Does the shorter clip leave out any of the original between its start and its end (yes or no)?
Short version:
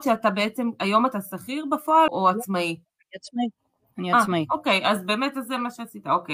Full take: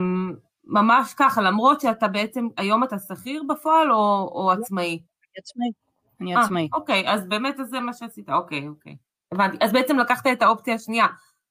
yes